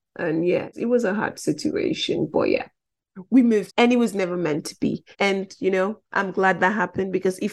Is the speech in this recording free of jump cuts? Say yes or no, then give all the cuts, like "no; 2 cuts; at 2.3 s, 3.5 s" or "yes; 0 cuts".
no; 2 cuts; at 3.7 s, 5.1 s